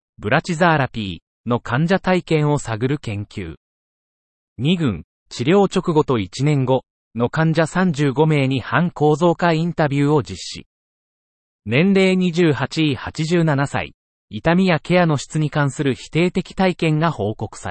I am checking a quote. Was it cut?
yes; 1 cut; at 14.1 s

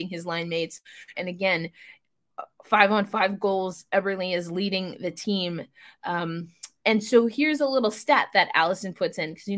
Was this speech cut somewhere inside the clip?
yes; 1 cut; at 1.1 s

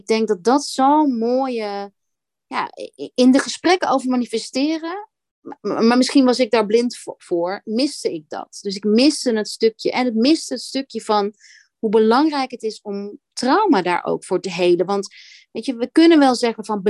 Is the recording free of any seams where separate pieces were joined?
yes; 0 cuts

